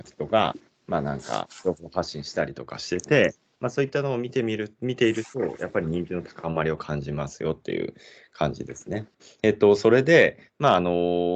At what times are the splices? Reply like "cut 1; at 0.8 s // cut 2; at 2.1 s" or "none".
none